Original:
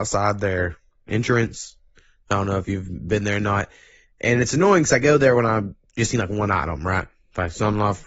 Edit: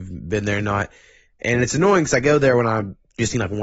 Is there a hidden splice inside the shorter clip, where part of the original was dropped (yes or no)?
no